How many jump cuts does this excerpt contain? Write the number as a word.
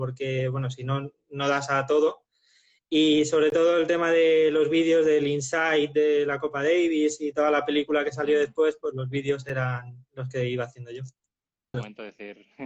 one